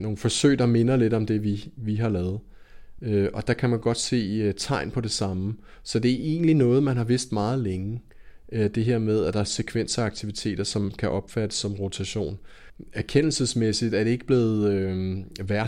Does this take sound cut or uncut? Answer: uncut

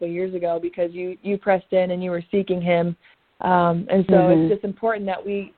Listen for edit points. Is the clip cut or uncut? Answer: uncut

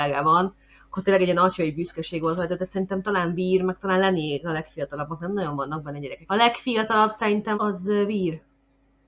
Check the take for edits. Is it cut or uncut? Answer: cut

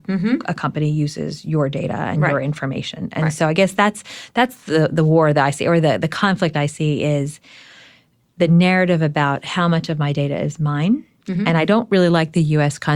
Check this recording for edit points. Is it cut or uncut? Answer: uncut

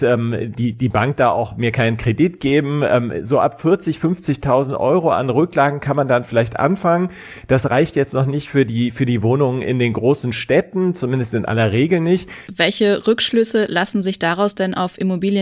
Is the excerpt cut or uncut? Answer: cut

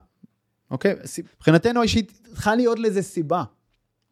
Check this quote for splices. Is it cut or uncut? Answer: cut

